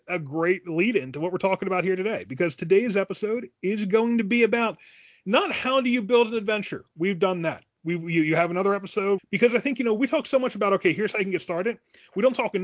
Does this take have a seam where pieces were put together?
yes; 1 cut; at 9.2 s

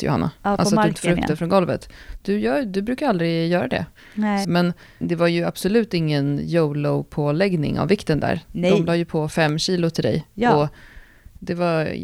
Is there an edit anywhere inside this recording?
yes; 1 cut; at 4.4 s

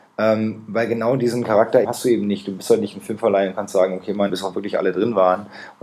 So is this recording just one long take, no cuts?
no; 2 cuts; at 1.8 s, 4.3 s

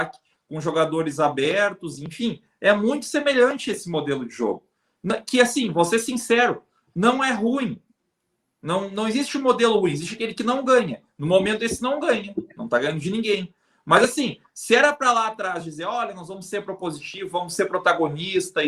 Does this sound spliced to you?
no; 0 cuts

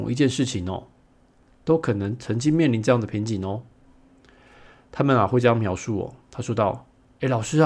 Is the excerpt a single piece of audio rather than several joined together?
no; 1 cut; at 1.5 s

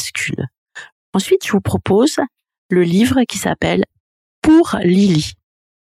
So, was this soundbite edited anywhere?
yes; 1 cut; at 0.9 s

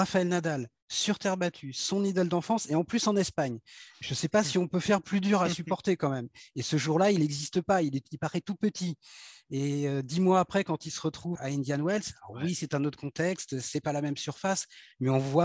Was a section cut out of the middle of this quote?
yes; 1 cut; at 11.4 s

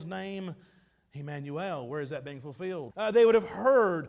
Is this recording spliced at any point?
yes; 1 cut; at 2.9 s

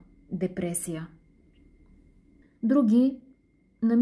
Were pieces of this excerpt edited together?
yes; 1 cut; at 2.5 s

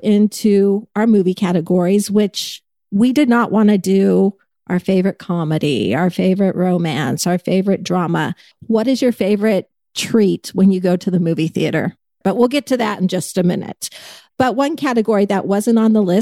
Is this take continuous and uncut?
no; 3 cuts; at 8.5 s, 12.2 s, 14.3 s

